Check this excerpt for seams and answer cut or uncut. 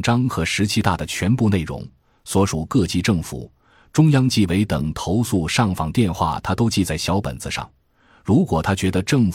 uncut